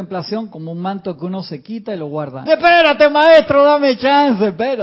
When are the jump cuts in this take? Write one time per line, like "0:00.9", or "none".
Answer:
0:02.5